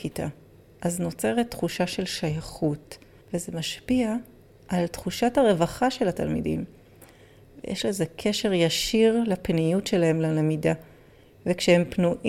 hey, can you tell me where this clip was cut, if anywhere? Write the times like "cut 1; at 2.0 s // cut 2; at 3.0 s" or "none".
cut 1; at 3.2 s